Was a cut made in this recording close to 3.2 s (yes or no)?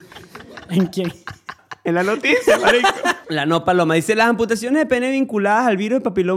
yes